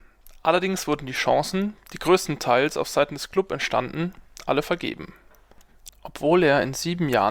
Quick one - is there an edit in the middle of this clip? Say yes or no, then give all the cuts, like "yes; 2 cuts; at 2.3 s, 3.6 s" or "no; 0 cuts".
yes; 1 cut; at 5.9 s